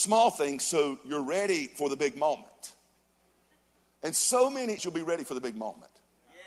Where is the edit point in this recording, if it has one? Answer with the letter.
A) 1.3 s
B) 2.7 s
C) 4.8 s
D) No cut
C